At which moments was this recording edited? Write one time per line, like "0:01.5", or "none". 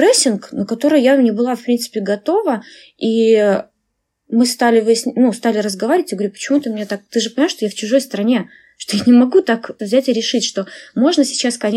0:09.8